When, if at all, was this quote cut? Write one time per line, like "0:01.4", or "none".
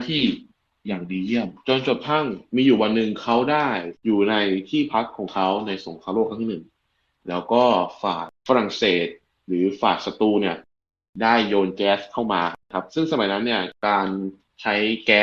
0:04.0
0:12.6